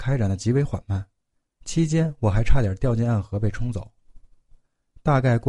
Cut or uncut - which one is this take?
uncut